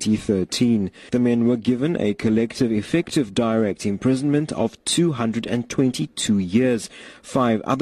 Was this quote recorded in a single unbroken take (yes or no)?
yes